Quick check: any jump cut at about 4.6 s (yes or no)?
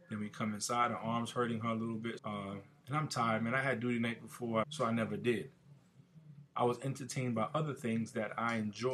yes